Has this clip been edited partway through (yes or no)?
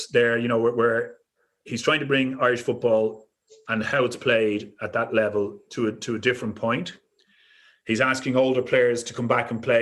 no